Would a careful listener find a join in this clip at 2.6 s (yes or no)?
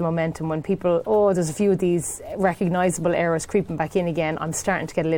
no